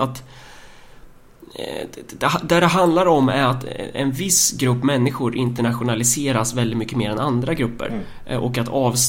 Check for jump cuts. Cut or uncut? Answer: uncut